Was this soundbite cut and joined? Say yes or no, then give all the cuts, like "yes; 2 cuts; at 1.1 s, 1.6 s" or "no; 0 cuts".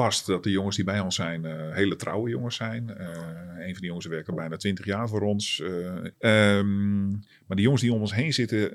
yes; 1 cut; at 6.1 s